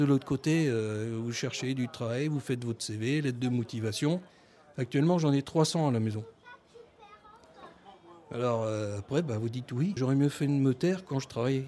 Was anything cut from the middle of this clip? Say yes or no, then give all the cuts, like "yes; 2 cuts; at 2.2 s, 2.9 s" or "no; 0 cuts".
yes; 1 cut; at 10.0 s